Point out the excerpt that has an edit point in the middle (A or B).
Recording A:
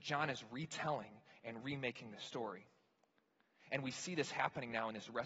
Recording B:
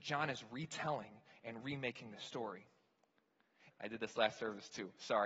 B